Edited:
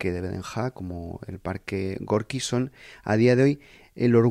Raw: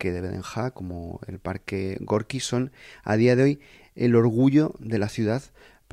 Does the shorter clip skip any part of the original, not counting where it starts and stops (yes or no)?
no